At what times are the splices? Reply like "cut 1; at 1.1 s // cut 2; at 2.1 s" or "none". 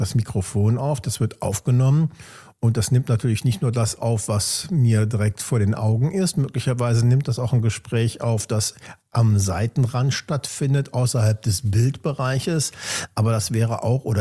none